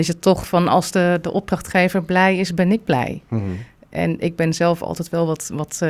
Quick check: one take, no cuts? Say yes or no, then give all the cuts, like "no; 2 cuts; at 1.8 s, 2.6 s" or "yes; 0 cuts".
yes; 0 cuts